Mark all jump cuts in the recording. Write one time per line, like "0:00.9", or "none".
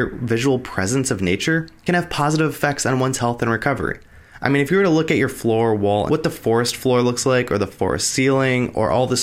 0:04.4
0:06.1